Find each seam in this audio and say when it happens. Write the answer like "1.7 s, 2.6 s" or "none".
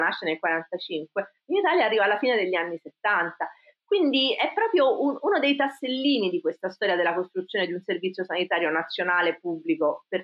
none